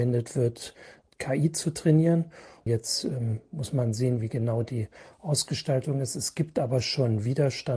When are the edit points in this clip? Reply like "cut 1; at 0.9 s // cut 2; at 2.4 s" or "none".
cut 1; at 2.6 s